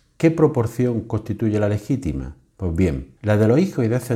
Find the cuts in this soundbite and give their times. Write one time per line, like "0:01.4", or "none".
0:03.2